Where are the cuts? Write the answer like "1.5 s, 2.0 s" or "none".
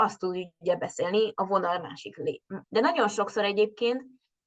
2.6 s